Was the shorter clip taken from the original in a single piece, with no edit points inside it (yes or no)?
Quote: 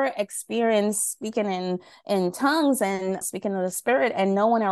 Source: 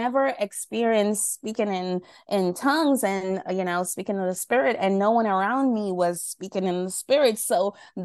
no